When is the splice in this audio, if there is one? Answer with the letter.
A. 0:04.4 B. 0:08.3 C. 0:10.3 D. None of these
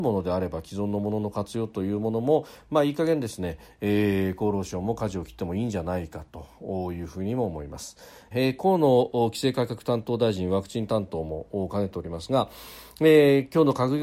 B